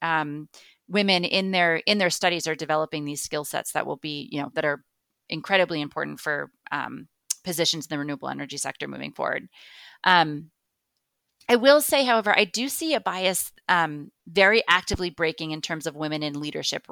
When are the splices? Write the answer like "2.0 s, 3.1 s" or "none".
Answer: 14.2 s